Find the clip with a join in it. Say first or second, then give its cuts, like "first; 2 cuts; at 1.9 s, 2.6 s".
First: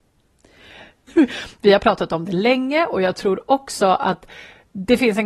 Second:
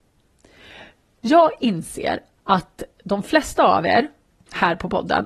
first; 1 cut; at 1.1 s